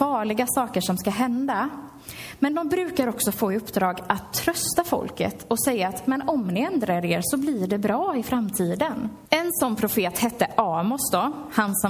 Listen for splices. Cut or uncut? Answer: cut